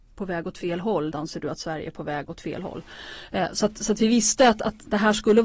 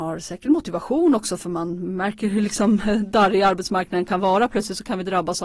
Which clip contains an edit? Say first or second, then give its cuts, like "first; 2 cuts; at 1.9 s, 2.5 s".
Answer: first; 1 cut; at 1.1 s